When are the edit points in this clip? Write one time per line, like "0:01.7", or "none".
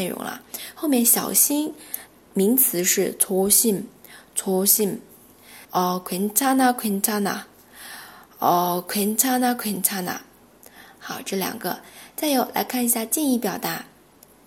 0:05.6